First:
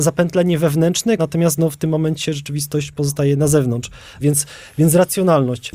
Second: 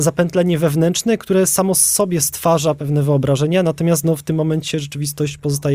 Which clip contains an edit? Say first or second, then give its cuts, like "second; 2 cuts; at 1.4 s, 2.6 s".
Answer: first; 2 cuts; at 1.2 s, 4.2 s